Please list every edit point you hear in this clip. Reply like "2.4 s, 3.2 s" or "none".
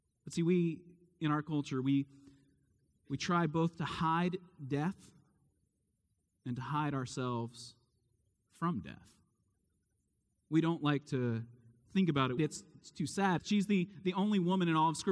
12.4 s, 13.4 s